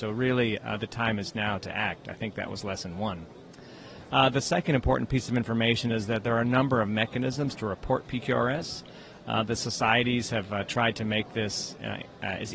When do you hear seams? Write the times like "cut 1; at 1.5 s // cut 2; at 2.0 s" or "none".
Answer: none